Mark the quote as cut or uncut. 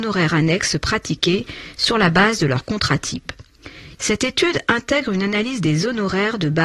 cut